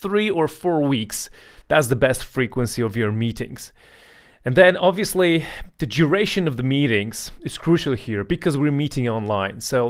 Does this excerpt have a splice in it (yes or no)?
no